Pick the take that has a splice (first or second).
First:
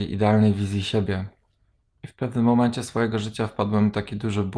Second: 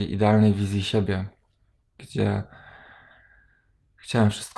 second